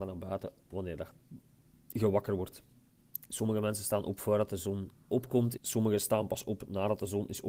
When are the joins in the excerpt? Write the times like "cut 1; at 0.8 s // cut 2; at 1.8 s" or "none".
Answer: cut 1; at 3.3 s // cut 2; at 5.6 s